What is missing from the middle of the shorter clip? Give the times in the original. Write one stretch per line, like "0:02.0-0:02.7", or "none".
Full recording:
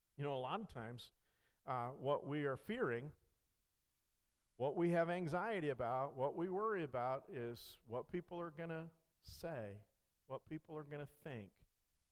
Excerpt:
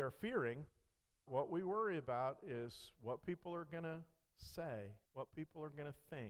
0:03.7-0:06.1
0:09.9-0:10.2